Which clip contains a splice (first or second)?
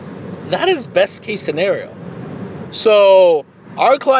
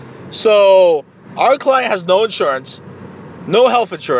first